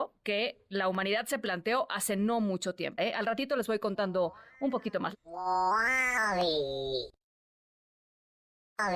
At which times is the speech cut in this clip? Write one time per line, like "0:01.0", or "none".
0:03.0